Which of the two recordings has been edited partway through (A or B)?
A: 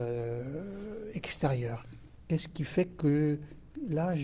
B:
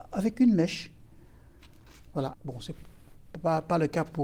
B